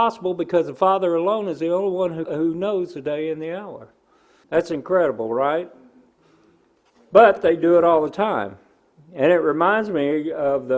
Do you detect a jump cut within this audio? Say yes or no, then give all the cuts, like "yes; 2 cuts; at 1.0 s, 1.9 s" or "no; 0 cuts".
yes; 2 cuts; at 2.3 s, 4.4 s